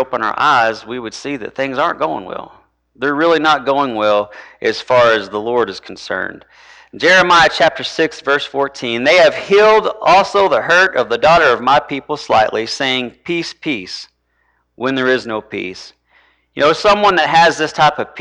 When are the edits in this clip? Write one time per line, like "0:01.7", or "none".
none